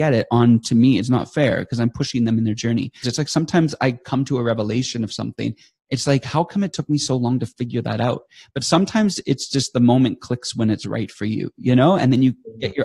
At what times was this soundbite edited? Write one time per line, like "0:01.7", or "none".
0:03.0